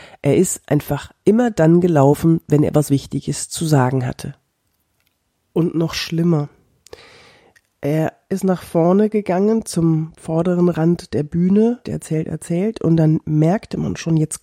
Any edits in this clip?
yes; 1 cut; at 11.9 s

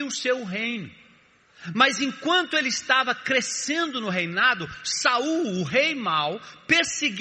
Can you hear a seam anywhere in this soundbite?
no; 0 cuts

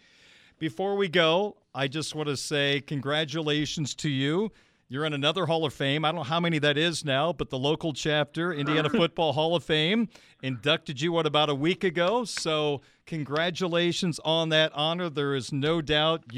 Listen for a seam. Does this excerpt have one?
no; 0 cuts

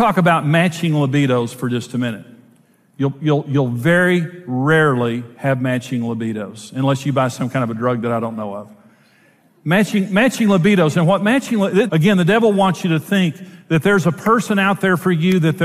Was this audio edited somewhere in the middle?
yes; 1 cut; at 11.9 s

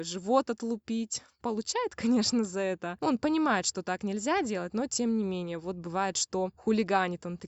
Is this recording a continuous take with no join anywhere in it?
yes; 0 cuts

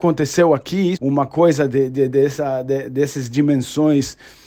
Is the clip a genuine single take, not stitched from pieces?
no; 1 cut; at 0.9 s

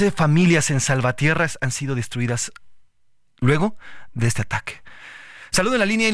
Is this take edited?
no; 0 cuts

